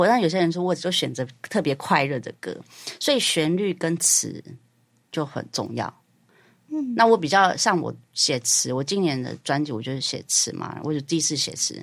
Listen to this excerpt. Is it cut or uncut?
uncut